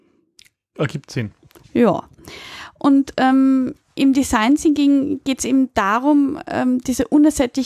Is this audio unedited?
yes; 0 cuts

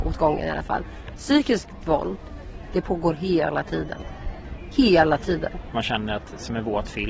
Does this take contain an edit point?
yes; 1 cut; at 5.7 s

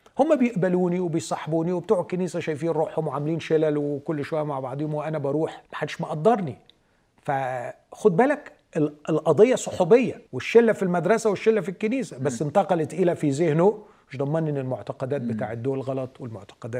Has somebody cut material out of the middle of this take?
yes; 2 cuts; at 5.7 s, 10.3 s

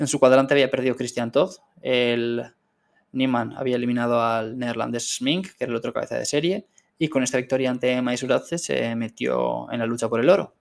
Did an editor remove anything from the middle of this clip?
no; 0 cuts

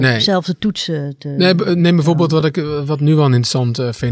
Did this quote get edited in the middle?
no; 0 cuts

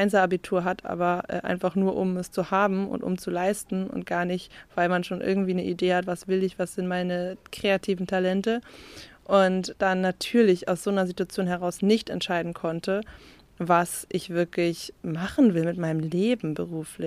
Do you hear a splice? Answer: yes; 1 cut; at 15.0 s

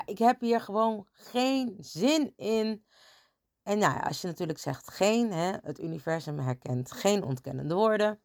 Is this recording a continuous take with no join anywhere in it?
yes; 0 cuts

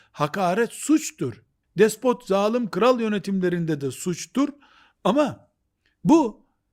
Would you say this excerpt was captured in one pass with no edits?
no; 1 cut; at 1.6 s

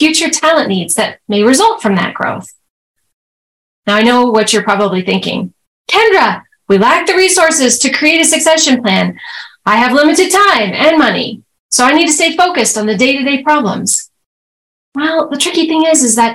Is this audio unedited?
yes; 0 cuts

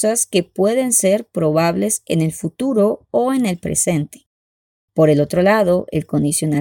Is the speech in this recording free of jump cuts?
yes; 0 cuts

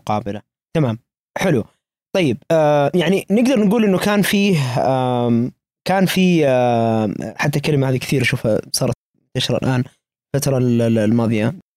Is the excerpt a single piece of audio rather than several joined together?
yes; 0 cuts

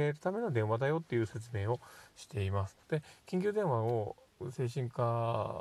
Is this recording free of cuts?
no; 1 cut; at 2.8 s

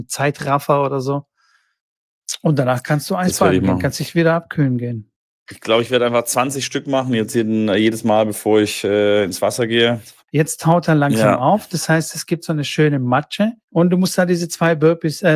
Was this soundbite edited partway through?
yes; 3 cuts; at 5.3 s, 10.2 s, 13.6 s

